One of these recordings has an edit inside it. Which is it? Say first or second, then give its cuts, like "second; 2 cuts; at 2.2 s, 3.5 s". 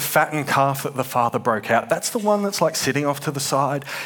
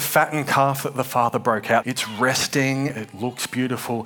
second; 2 cuts; at 1.8 s, 2.9 s